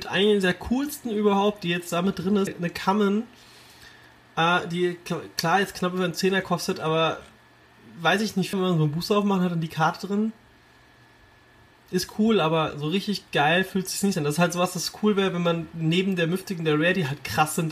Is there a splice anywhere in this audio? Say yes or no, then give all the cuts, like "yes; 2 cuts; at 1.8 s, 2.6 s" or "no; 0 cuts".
yes; 2 cuts; at 2.5 s, 8.5 s